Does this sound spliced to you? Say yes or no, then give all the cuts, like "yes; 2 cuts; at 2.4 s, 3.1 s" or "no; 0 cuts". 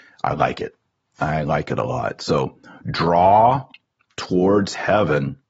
no; 0 cuts